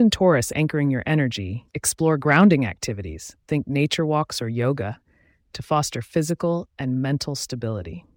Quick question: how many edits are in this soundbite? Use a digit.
0